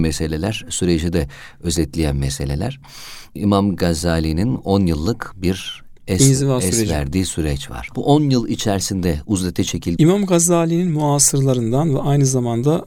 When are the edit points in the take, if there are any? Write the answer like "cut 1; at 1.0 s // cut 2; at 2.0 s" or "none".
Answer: cut 1; at 7.9 s // cut 2; at 10.0 s

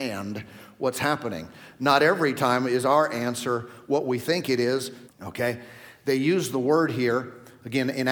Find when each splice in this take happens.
cut 1; at 5.1 s

